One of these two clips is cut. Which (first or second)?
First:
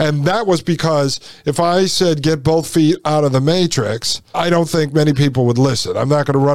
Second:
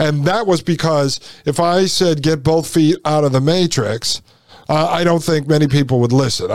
first